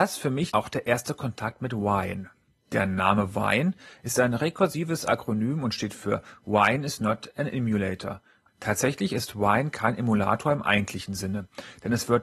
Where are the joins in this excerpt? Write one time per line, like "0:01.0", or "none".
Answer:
0:02.6
0:08.5